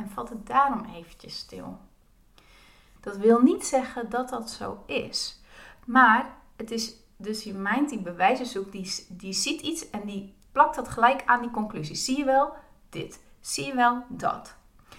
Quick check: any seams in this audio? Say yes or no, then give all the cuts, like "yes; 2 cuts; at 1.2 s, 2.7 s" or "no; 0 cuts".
yes; 1 cut; at 3.0 s